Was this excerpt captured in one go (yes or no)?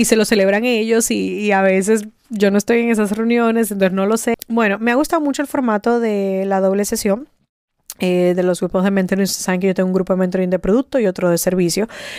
no